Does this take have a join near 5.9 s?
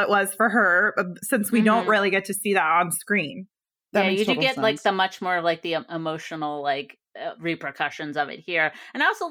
no; 0 cuts

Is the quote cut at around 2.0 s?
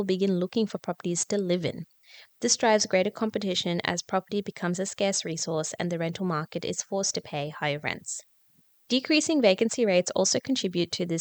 no; 0 cuts

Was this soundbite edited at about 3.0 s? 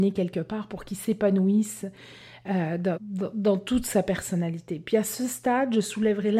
yes; 1 cut; at 3.0 s

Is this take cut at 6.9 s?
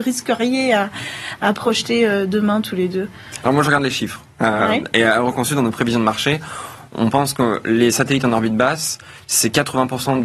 no; 0 cuts

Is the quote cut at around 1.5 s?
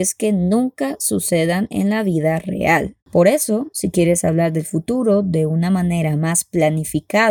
no; 1 cut; at 3.0 s

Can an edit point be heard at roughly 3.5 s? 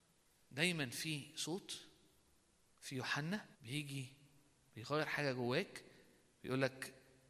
yes; 1 cut; at 3.5 s

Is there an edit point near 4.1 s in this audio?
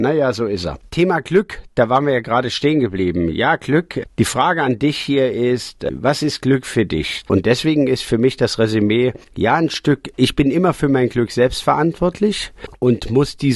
no; 1 cut; at 7.2 s

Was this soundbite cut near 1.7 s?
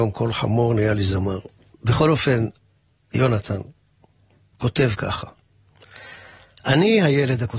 yes; 1 cut; at 1.7 s

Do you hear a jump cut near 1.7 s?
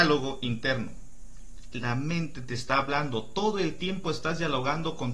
yes; 1 cut; at 1.7 s

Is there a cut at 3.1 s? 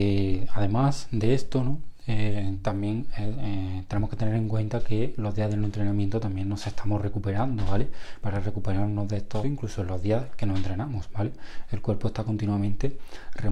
no; 2 cuts; at 8.2 s, 9.4 s

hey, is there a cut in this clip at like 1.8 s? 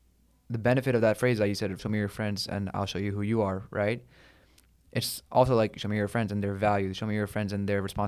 yes; 1 cut; at 1.8 s

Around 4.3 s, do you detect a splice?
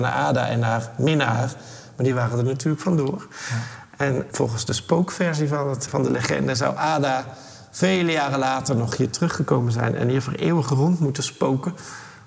yes; 2 cuts; at 4.3 s, 5.9 s

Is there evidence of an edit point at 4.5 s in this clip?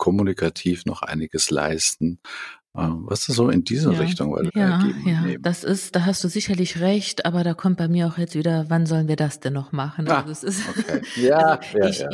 yes; 1 cut; at 4.5 s

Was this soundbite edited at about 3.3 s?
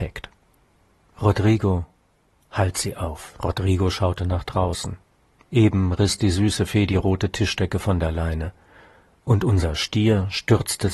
no; 1 cut; at 1.1 s

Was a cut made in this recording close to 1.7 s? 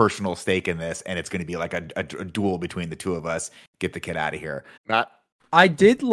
no; 1 cut; at 4.8 s

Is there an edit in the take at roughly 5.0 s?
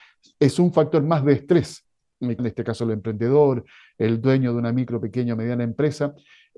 no; 1 cut; at 2.4 s

